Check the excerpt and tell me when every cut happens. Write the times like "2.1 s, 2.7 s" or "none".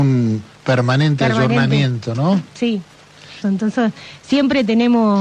3.4 s